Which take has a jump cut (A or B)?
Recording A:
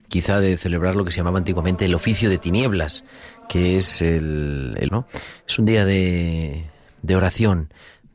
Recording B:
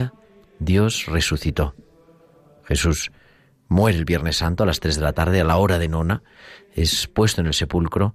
A